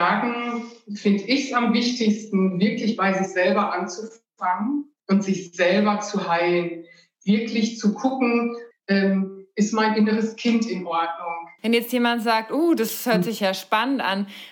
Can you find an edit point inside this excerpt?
yes; 2 cuts; at 8.7 s, 11.6 s

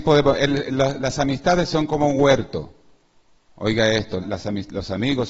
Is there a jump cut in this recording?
yes; 1 cut; at 4.2 s

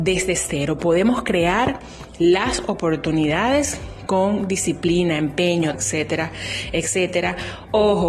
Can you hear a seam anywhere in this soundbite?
yes; 1 cut; at 5.7 s

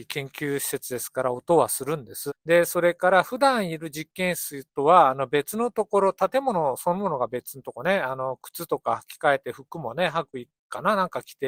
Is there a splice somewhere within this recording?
yes; 1 cut; at 2.3 s

